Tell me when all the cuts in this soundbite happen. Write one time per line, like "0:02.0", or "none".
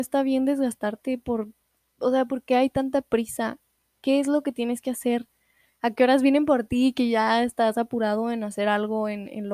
none